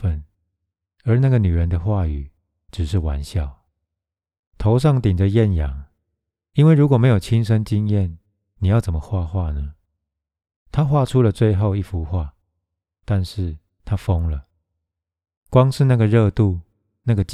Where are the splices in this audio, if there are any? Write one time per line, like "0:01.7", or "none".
0:04.5